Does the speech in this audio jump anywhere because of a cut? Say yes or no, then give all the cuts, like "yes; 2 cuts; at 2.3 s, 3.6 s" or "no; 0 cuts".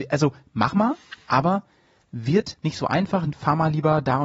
no; 0 cuts